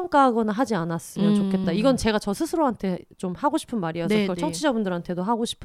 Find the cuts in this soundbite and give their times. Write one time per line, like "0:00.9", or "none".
none